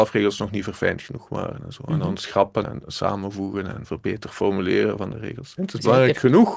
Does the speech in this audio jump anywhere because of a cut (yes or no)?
yes